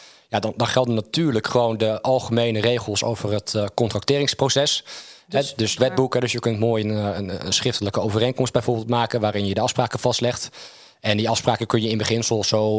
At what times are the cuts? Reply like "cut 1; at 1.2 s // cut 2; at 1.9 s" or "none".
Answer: cut 1; at 5.8 s